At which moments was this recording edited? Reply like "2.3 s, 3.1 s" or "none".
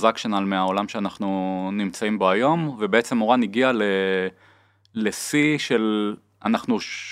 none